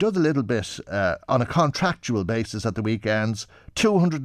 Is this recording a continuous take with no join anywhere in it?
yes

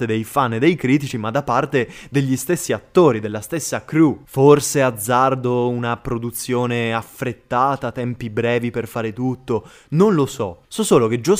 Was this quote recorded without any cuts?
yes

